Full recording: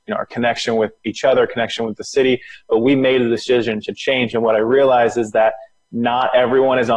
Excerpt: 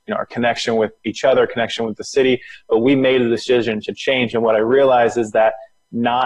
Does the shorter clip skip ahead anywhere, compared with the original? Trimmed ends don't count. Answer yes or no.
no